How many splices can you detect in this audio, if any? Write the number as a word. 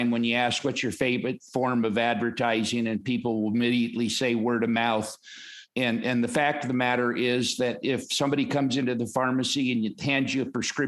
zero